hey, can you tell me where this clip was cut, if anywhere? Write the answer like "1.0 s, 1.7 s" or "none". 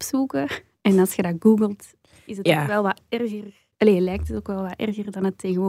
none